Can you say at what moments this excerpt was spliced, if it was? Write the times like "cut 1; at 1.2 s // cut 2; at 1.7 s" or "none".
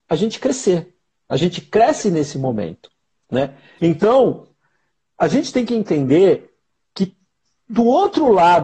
cut 1; at 3.8 s